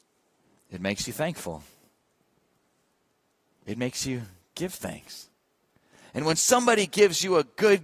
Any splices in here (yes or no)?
no